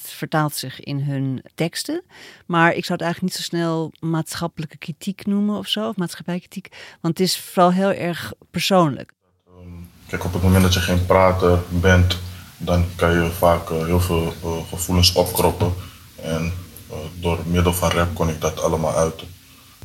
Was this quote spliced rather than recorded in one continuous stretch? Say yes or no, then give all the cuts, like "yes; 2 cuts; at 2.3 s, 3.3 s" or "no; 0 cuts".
no; 0 cuts